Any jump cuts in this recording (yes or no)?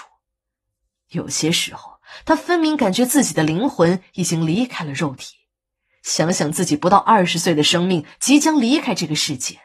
no